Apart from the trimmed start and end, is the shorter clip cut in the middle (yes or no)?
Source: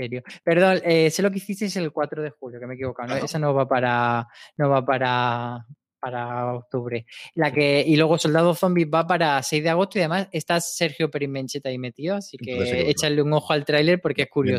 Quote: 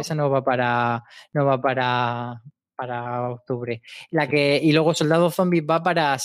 no